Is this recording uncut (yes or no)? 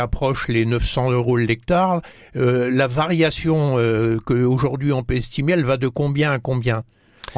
yes